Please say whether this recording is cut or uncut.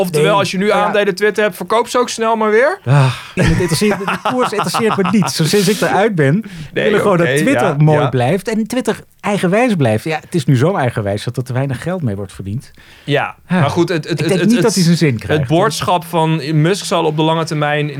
cut